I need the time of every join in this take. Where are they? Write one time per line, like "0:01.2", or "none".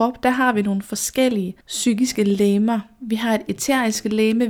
0:01.6